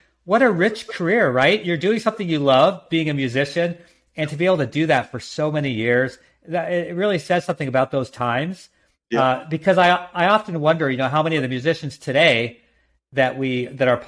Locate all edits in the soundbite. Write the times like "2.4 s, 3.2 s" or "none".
none